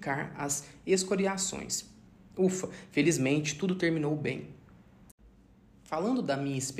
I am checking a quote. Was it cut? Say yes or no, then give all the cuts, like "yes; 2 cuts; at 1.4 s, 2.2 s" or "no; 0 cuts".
no; 0 cuts